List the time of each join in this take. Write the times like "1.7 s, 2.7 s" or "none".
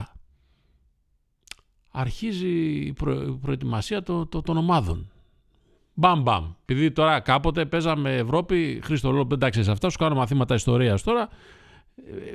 none